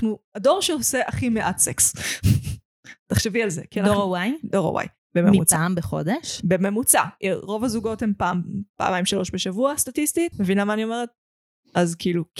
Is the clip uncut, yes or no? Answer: no